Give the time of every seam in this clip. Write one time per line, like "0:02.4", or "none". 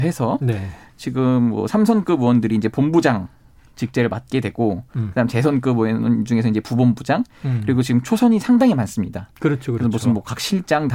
none